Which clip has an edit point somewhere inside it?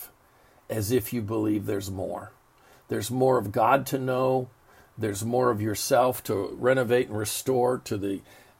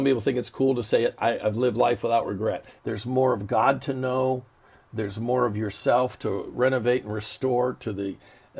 second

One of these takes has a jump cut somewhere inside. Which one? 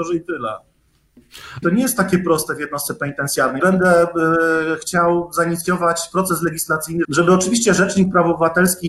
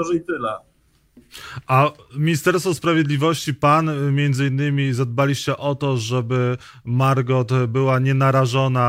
first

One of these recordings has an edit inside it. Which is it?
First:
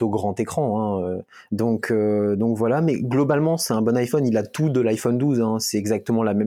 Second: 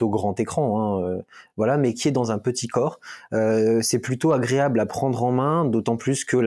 first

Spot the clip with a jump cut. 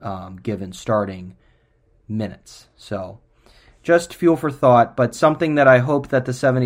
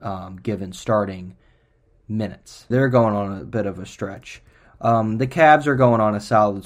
second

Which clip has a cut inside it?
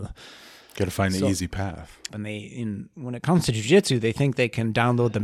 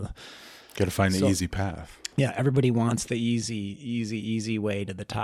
first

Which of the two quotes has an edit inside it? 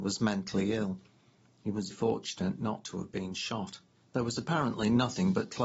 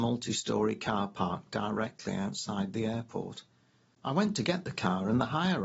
first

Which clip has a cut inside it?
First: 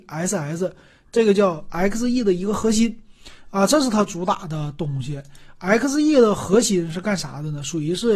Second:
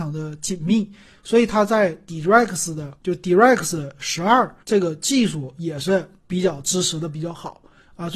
second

